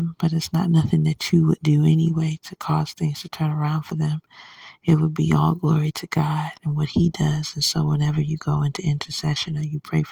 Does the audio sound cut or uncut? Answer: uncut